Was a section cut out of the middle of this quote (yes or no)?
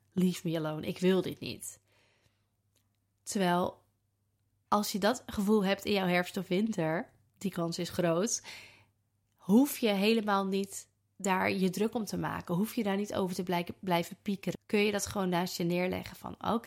yes